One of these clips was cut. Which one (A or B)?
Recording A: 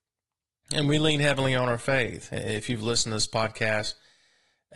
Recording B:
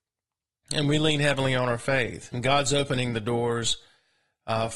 B